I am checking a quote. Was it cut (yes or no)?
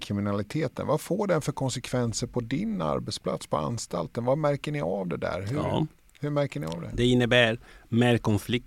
no